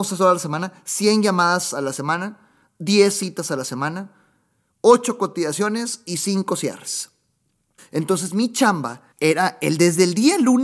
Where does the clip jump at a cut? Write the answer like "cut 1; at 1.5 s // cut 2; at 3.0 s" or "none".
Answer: cut 1; at 7.8 s // cut 2; at 9.1 s